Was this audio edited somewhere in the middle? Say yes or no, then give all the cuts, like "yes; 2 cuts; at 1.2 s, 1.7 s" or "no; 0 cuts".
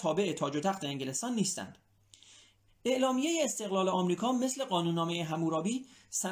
yes; 1 cut; at 2.7 s